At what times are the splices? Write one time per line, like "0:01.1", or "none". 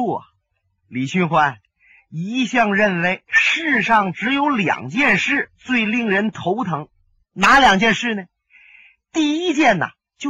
none